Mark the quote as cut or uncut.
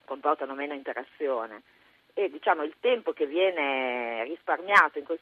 uncut